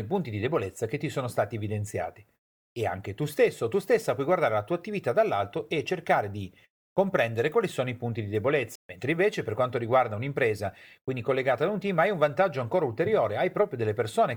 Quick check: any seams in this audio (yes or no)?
yes